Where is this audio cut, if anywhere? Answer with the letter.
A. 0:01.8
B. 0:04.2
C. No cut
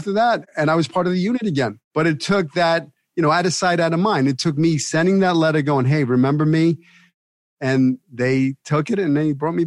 A